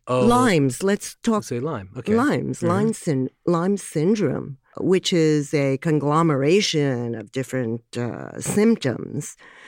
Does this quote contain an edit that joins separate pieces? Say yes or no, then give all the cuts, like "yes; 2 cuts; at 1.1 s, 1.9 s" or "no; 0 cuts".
no; 0 cuts